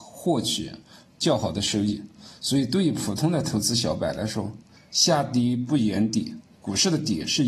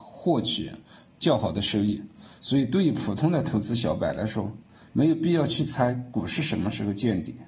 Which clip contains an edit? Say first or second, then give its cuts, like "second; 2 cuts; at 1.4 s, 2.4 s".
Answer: first; 1 cut; at 4.8 s